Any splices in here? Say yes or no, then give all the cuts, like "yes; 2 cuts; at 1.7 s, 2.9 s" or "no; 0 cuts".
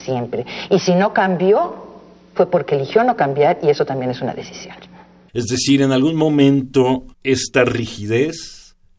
yes; 2 cuts; at 5.3 s, 7.1 s